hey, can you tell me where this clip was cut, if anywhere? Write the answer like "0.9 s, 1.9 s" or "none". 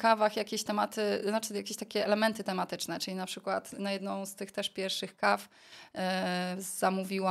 none